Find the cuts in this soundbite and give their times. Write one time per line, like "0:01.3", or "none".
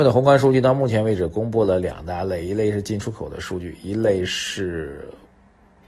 none